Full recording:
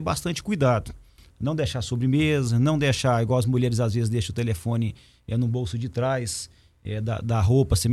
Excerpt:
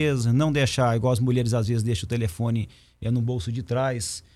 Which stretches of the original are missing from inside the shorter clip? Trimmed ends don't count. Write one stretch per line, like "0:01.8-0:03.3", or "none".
none